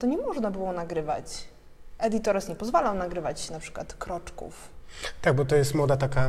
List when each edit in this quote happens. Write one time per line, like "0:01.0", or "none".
none